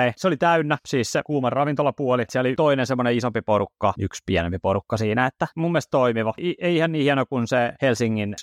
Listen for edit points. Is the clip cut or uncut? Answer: cut